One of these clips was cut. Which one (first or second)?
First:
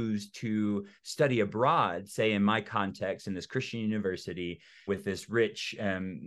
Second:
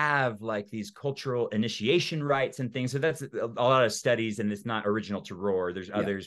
first